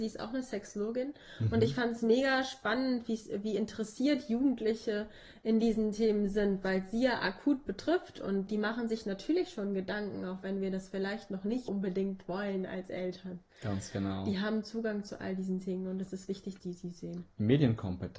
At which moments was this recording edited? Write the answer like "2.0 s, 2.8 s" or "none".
11.7 s, 16.6 s